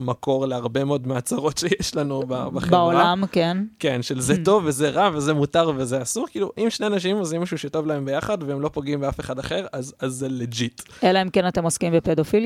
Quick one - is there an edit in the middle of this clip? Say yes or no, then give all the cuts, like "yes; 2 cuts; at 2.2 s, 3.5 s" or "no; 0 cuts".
no; 0 cuts